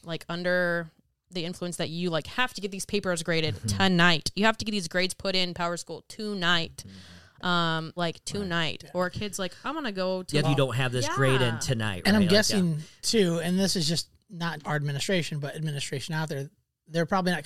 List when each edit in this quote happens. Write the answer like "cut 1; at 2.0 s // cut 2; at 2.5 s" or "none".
cut 1; at 8.0 s // cut 2; at 10.4 s // cut 3; at 14.6 s